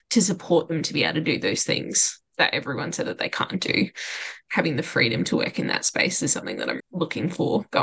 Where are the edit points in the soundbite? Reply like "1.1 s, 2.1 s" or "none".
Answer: 6.8 s